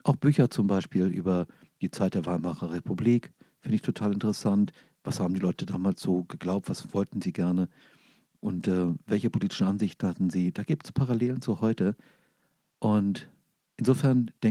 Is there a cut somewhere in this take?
no; 0 cuts

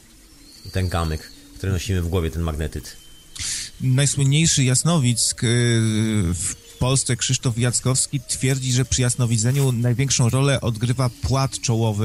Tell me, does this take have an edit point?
no; 0 cuts

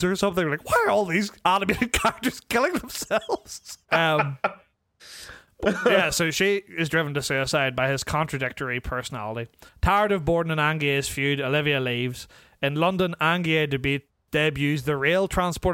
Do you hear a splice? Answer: yes; 2 cuts; at 3.9 s, 9.7 s

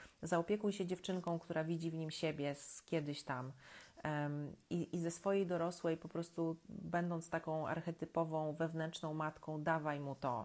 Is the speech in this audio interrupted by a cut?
no; 0 cuts

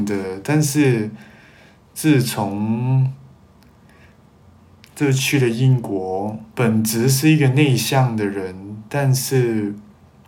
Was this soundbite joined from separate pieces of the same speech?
yes; 2 cuts; at 4.9 s, 6.5 s

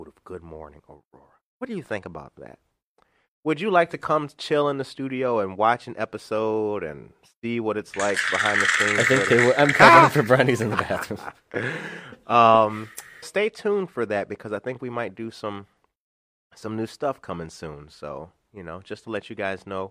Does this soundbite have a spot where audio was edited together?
yes; 1 cut; at 13.2 s

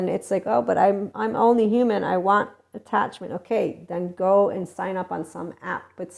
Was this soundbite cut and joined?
no; 0 cuts

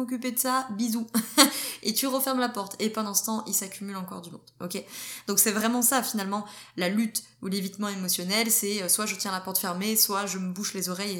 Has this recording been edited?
no; 0 cuts

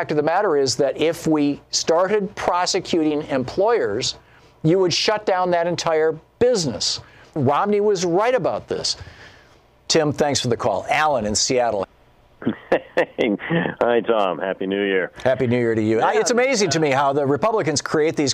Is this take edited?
yes; 1 cut; at 11.8 s

